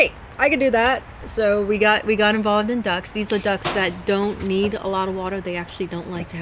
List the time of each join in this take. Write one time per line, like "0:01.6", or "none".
none